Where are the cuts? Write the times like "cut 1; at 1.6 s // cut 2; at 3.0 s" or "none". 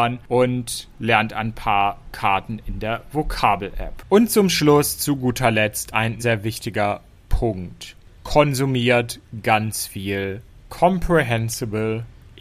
cut 1; at 6.2 s